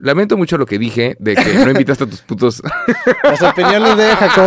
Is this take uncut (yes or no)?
yes